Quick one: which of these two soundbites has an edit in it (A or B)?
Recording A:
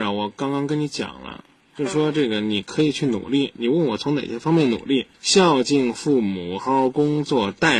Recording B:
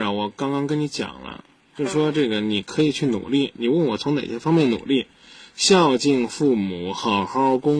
A